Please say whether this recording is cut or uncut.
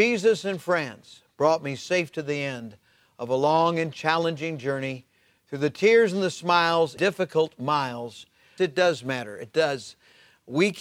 cut